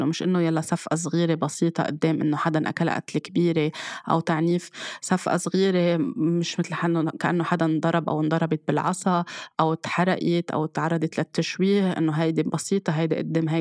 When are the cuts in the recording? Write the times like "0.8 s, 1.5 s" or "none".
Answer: none